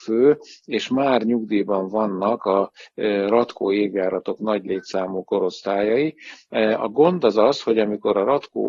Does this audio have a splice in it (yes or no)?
no